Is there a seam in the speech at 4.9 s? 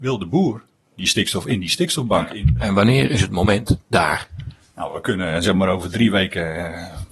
no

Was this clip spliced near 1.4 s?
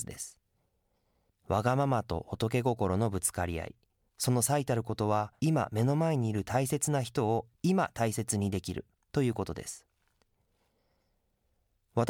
no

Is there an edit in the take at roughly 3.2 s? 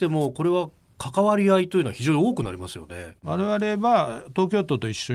yes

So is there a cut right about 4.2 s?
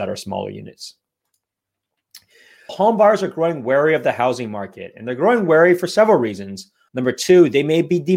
no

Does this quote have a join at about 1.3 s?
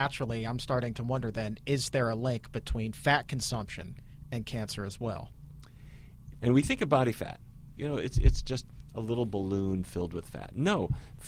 no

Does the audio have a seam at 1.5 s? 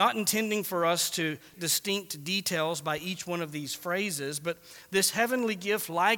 yes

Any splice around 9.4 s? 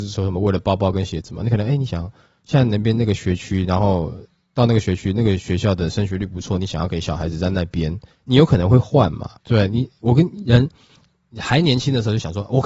yes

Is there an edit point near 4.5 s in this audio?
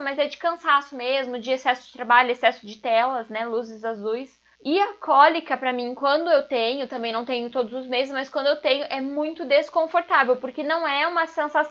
yes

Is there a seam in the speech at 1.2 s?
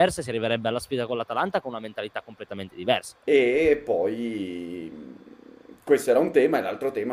no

